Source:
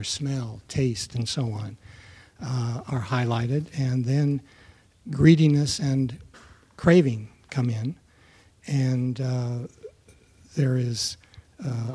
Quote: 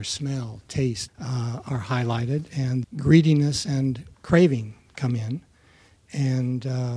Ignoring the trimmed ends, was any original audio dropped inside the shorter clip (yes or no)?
yes